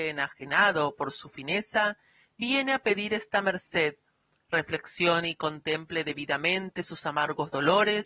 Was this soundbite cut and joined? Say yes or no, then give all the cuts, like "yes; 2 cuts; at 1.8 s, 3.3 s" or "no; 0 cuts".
no; 0 cuts